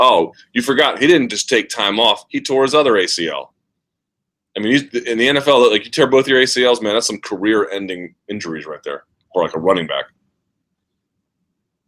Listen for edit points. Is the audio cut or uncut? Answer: uncut